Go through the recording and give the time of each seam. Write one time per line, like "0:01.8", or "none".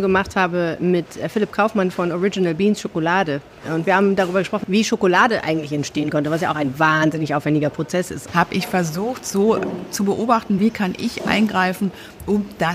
0:04.6
0:08.3
0:10.6